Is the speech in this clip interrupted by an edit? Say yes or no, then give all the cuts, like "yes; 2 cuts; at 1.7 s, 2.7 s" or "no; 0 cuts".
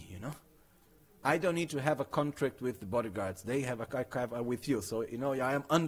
no; 0 cuts